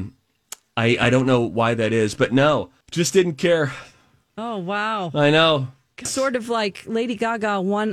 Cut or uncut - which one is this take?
cut